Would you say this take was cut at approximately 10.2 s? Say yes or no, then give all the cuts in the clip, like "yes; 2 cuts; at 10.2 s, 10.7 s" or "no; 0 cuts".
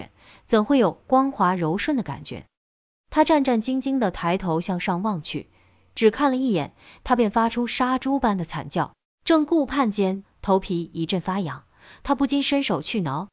yes; 2 cuts; at 9.1 s, 10.2 s